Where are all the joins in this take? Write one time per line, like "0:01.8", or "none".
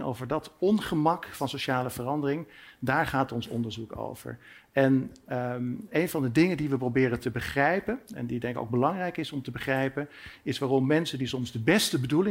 0:05.9